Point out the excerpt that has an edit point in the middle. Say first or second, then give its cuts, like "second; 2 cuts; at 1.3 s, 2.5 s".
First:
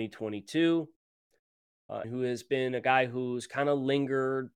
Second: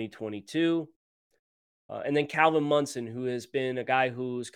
first; 1 cut; at 2.0 s